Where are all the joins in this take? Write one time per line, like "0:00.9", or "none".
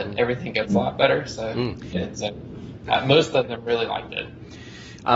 0:01.9